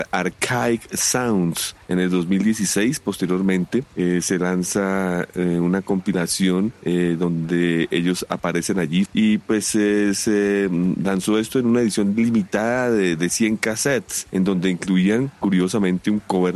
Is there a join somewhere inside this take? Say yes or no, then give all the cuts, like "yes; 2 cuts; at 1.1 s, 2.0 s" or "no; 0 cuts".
yes; 1 cut; at 9.1 s